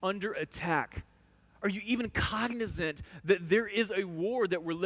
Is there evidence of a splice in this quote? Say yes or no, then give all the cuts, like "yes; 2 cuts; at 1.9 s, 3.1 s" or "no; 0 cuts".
no; 0 cuts